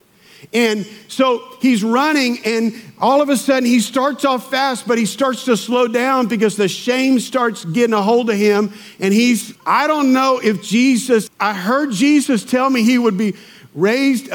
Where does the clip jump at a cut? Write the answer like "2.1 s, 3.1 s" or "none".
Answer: 9.6 s, 11.3 s